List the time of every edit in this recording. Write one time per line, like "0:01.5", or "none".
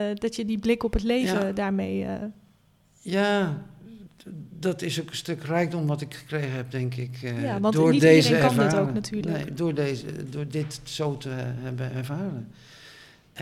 none

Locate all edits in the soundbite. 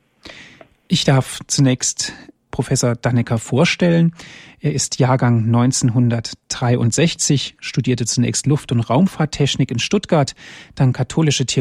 0:02.5

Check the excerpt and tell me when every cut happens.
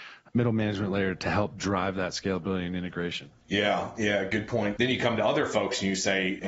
0:03.4
0:04.8

